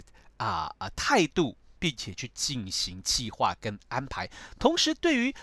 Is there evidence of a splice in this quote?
no; 0 cuts

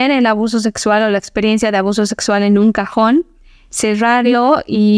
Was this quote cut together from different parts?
no; 0 cuts

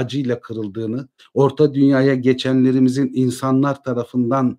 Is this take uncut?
no; 1 cut; at 1.2 s

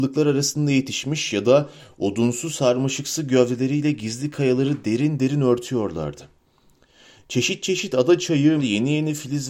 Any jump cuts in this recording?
yes; 1 cut; at 8.6 s

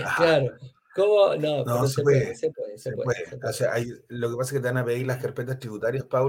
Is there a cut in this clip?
no; 0 cuts

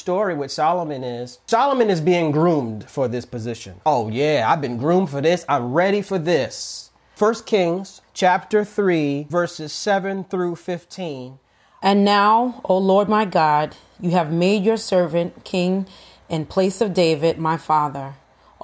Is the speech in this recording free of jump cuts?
no; 2 cuts; at 3.8 s, 7.1 s

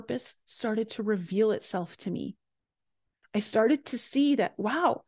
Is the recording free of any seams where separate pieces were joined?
yes; 0 cuts

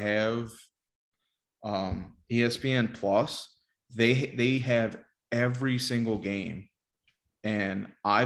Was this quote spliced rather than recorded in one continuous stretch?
no; 0 cuts

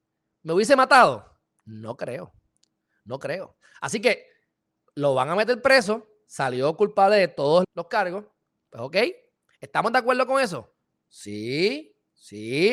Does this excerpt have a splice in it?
yes; 1 cut; at 7.6 s

